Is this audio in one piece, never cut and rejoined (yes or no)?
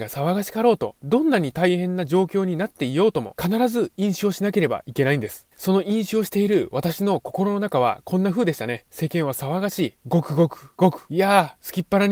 no